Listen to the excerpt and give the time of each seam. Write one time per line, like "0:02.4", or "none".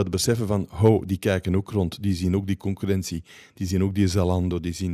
none